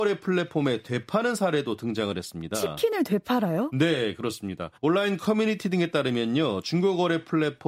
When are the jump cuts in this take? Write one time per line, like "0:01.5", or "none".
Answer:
0:04.8